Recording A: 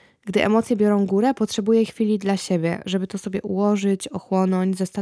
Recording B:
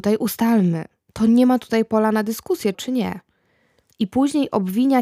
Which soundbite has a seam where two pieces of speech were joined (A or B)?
B